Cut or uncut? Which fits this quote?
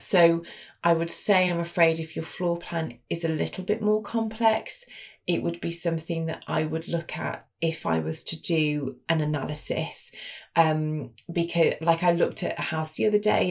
uncut